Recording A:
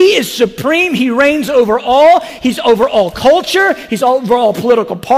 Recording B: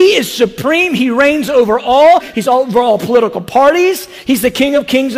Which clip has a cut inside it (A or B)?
B